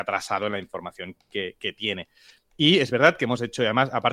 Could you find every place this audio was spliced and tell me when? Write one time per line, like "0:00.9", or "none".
none